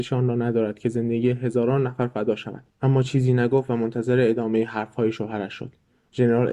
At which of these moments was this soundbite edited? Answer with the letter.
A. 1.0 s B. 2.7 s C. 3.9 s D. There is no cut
B